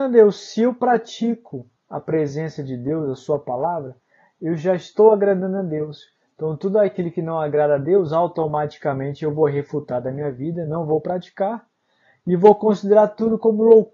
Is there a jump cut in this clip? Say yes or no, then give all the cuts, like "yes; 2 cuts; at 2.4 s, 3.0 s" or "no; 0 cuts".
no; 0 cuts